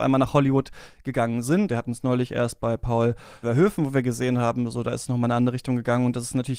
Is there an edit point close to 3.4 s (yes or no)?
yes